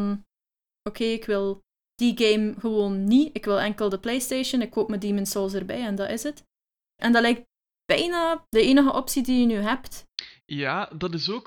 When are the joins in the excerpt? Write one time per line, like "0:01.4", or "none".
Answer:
0:07.0
0:08.5